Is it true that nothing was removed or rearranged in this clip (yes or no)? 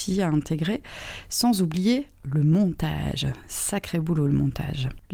yes